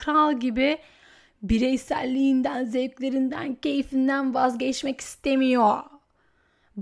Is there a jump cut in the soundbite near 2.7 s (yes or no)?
no